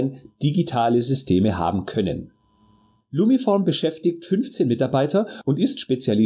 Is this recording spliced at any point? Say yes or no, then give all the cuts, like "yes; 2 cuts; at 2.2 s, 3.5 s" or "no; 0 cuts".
no; 0 cuts